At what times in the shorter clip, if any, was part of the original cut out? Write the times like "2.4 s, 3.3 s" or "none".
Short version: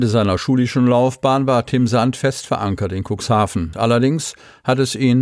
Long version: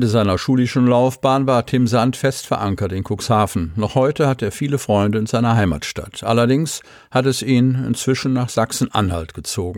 3.7 s